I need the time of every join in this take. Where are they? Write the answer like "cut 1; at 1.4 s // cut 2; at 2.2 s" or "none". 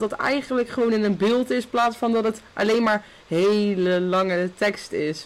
none